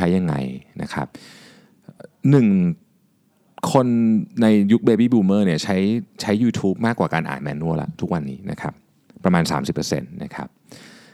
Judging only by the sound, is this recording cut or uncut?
uncut